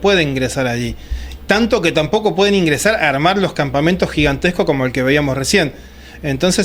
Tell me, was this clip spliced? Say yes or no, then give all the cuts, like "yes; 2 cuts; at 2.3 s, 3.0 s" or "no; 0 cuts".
no; 0 cuts